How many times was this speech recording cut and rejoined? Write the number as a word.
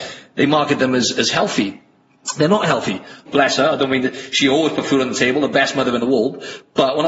one